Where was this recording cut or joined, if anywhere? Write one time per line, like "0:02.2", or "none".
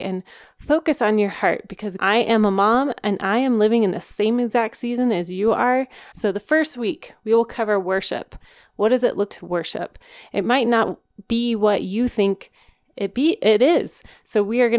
0:02.0
0:06.1
0:09.3